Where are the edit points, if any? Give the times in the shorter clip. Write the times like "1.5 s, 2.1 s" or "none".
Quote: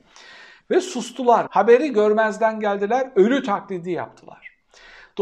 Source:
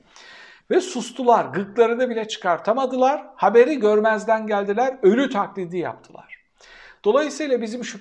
1.5 s